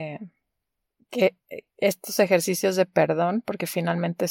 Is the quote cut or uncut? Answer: uncut